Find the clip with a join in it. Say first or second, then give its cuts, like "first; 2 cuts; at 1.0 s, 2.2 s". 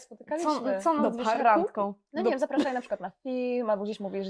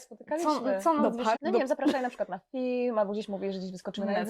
second; 1 cut; at 1.3 s